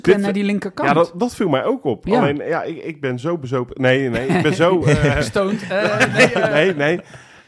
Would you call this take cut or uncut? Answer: uncut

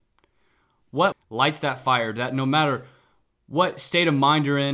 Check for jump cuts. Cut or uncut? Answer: cut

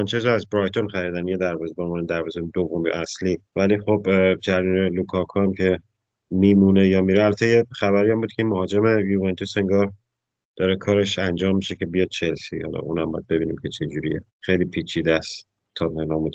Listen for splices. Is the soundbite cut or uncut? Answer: cut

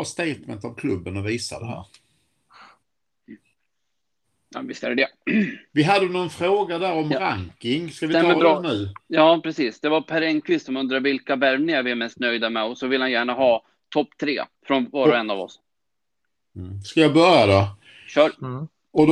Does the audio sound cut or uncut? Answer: cut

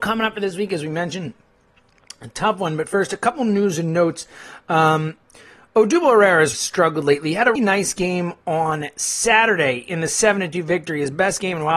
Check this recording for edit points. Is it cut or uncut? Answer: cut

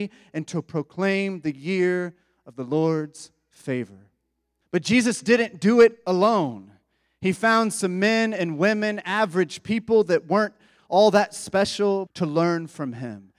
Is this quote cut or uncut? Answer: cut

